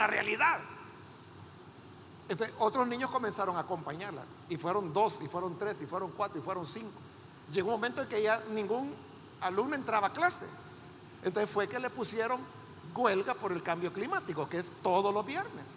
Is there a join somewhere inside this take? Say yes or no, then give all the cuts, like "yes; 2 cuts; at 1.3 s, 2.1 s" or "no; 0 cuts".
no; 0 cuts